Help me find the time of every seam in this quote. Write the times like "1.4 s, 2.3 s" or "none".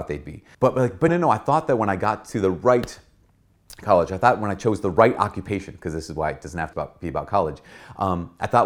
1.1 s, 6.7 s